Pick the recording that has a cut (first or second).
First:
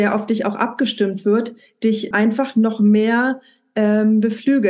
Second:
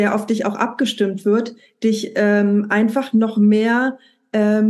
first